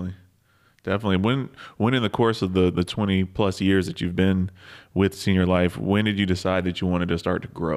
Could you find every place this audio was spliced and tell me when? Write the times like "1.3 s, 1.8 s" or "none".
none